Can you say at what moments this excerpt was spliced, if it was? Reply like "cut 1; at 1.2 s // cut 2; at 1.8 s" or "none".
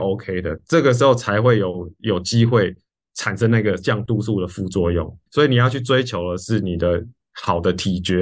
cut 1; at 5.3 s